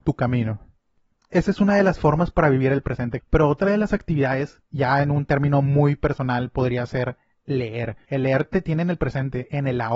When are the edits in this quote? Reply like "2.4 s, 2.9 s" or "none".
3.2 s